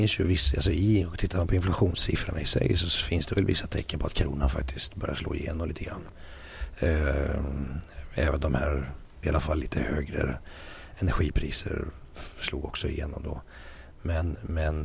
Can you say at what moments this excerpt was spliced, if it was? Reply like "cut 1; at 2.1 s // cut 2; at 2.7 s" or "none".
cut 1; at 9.2 s